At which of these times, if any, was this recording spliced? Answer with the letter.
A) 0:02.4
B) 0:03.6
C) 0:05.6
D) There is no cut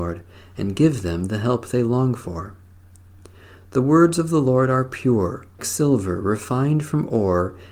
C